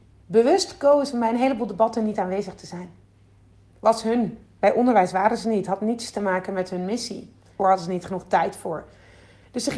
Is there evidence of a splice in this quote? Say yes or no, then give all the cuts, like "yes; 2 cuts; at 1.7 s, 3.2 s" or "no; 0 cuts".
yes; 1 cut; at 7.6 s